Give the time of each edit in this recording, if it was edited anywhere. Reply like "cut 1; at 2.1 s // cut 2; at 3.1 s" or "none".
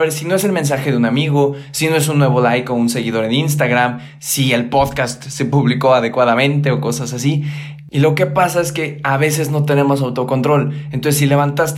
none